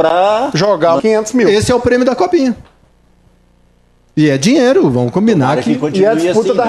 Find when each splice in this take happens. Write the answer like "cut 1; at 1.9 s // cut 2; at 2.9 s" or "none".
cut 1; at 1.0 s